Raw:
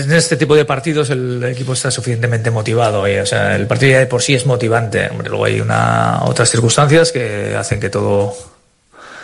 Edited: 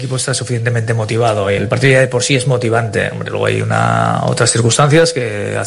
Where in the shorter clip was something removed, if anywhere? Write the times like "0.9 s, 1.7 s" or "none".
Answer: 1.6 s